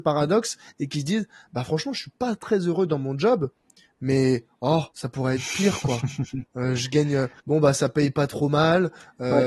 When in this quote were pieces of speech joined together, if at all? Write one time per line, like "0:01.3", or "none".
0:04.9
0:07.4